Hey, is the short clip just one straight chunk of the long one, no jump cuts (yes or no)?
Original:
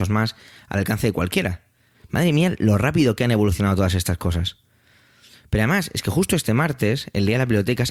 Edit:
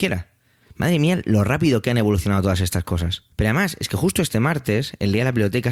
no